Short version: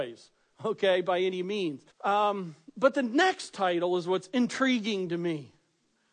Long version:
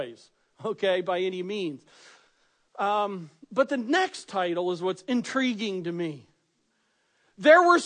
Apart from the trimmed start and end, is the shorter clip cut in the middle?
yes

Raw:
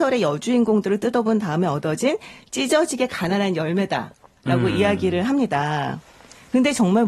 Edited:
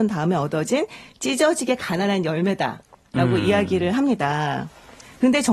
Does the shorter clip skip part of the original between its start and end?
no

